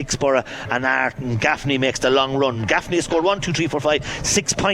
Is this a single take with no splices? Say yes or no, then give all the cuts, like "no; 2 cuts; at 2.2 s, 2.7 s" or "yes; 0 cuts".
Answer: yes; 0 cuts